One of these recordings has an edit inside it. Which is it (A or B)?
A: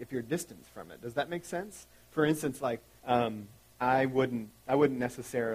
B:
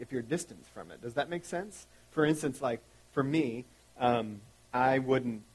A